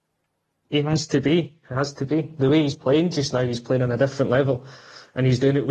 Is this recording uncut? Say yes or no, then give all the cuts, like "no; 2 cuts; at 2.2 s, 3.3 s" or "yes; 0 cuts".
yes; 0 cuts